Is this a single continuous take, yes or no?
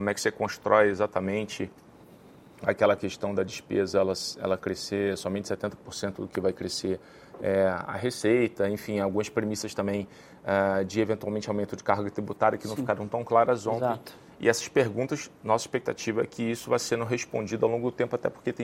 yes